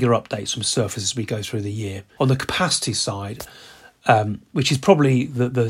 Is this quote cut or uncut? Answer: cut